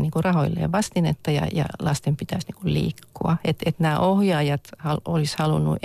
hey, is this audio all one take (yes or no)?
yes